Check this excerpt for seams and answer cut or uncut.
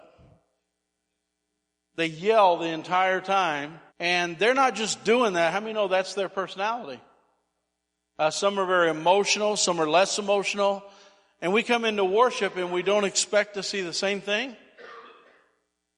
cut